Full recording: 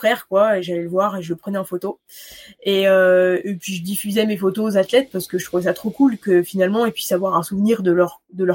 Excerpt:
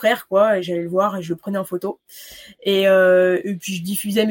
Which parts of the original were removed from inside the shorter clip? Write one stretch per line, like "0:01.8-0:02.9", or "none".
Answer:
none